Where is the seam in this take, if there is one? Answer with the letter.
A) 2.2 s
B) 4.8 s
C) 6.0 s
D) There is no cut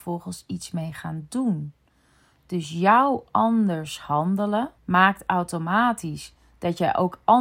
B